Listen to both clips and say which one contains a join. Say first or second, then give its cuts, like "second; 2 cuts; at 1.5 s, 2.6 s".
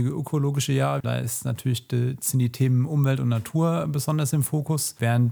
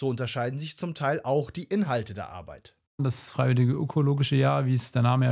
first; 1 cut; at 1.0 s